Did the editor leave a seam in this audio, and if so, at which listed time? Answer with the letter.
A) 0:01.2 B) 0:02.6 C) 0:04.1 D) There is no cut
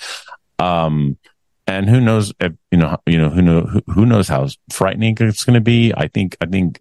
D